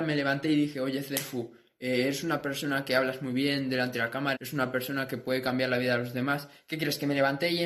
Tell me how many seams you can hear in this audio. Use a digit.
1